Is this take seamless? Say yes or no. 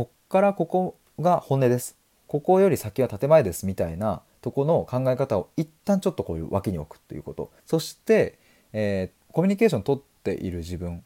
no